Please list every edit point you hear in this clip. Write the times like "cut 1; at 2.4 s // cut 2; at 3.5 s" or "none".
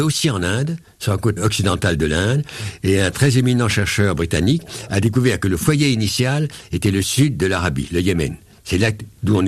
cut 1; at 1.4 s